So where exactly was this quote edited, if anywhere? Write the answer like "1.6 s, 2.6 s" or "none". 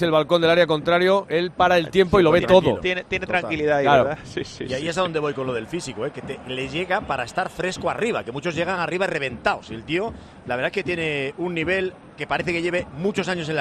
none